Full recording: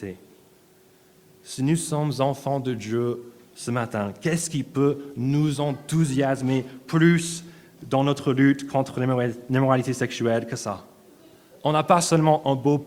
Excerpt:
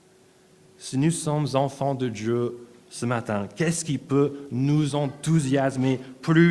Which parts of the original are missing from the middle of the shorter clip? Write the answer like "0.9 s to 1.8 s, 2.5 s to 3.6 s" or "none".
none